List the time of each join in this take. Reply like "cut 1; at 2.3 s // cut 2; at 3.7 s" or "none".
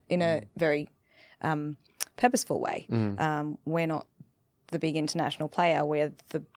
none